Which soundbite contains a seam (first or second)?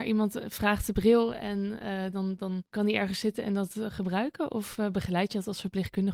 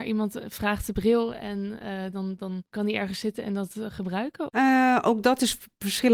second